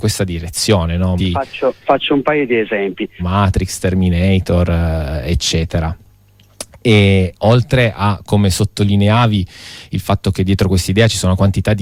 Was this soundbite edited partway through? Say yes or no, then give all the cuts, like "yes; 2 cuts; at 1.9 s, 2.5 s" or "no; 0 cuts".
yes; 2 cuts; at 1.2 s, 3.2 s